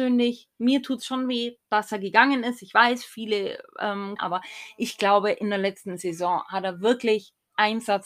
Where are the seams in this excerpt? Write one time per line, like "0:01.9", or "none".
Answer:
0:04.2